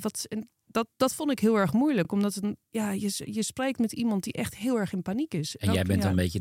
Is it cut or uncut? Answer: uncut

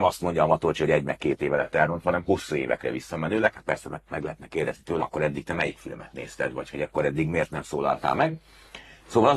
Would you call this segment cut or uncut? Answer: cut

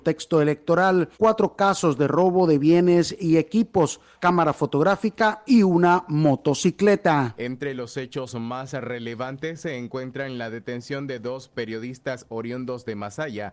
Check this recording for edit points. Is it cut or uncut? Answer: cut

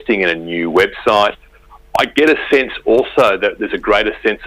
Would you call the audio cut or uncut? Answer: uncut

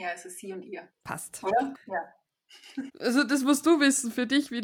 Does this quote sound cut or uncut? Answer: cut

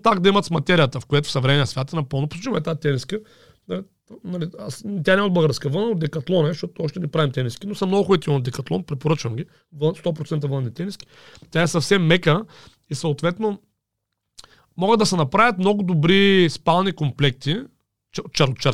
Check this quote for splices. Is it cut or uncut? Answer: uncut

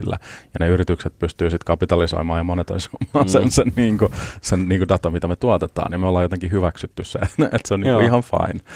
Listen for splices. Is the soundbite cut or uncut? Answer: uncut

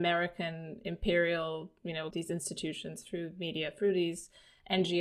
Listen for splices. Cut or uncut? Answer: cut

